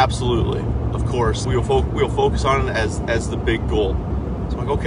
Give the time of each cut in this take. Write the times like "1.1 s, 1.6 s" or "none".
1.4 s